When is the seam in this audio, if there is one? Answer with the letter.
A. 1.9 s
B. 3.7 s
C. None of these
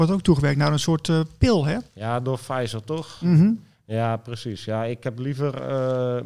A